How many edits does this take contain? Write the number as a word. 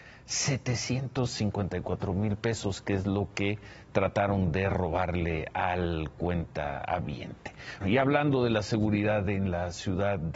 one